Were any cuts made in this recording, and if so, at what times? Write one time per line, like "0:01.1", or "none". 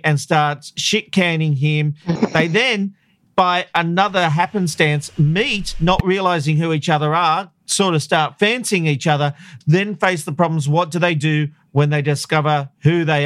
0:02.2